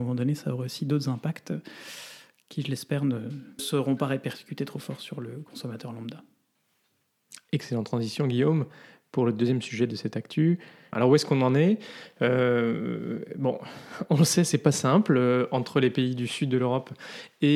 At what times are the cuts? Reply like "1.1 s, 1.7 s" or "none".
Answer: 3.6 s, 10.9 s